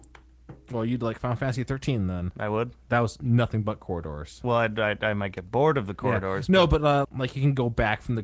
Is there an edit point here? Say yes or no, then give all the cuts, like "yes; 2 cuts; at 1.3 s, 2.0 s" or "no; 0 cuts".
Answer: yes; 1 cut; at 7.0 s